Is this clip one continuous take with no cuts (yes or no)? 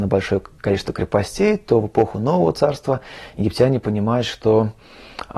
yes